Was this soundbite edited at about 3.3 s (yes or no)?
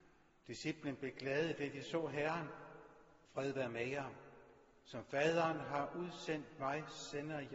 yes